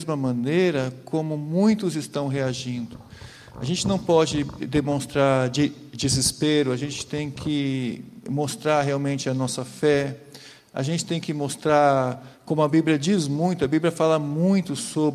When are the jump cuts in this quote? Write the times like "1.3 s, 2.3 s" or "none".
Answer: none